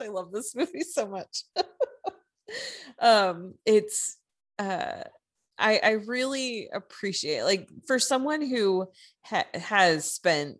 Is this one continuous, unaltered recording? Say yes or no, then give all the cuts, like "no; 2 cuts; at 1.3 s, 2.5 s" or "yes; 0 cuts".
yes; 0 cuts